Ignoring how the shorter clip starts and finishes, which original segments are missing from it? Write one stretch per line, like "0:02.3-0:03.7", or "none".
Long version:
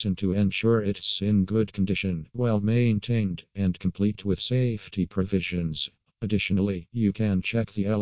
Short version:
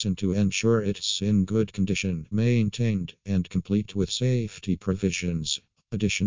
0:02.3-0:02.6